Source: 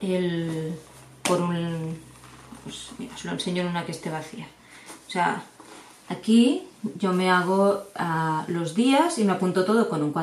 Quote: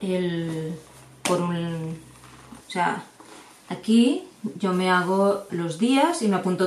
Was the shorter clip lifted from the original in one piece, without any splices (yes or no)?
no